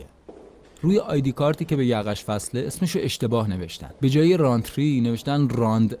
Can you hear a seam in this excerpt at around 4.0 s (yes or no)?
yes